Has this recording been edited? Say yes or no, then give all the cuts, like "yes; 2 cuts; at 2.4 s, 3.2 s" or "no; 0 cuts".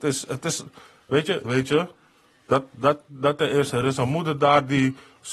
yes; 1 cut; at 1.4 s